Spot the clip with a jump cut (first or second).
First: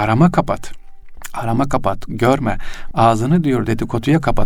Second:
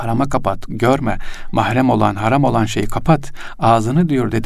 first